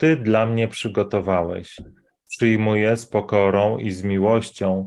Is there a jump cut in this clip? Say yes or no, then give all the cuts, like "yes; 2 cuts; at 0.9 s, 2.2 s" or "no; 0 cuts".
no; 0 cuts